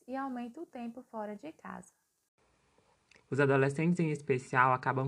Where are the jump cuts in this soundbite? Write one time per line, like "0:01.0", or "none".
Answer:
0:03.2